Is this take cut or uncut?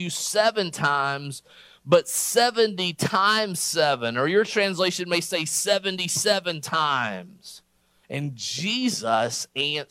cut